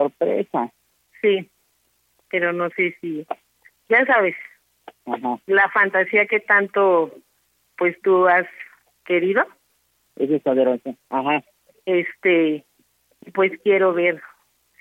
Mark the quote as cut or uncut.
uncut